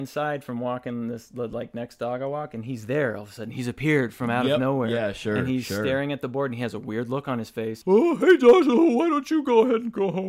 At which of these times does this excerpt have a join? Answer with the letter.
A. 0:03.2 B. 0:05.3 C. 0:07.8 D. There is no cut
C